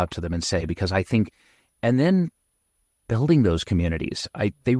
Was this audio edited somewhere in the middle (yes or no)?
no